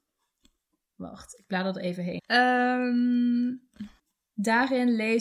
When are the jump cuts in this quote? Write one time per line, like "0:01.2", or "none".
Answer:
0:02.2